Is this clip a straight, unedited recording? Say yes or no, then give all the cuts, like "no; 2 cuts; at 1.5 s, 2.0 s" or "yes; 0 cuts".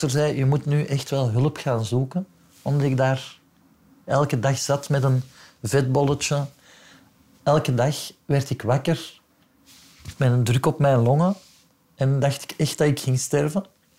yes; 0 cuts